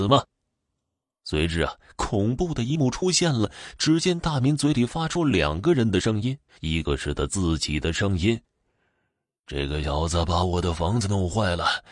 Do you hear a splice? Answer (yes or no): yes